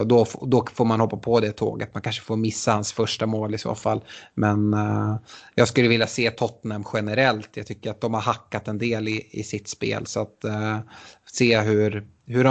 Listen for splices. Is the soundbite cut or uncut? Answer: uncut